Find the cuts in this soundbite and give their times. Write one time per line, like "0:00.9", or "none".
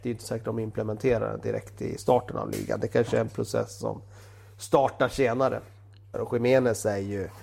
0:06.1